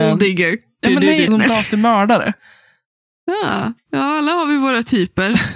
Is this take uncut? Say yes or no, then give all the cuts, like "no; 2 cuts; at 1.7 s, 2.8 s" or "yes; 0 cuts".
no; 1 cut; at 1.3 s